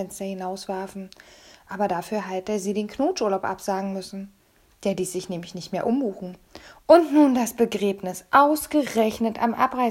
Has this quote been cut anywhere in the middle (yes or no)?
yes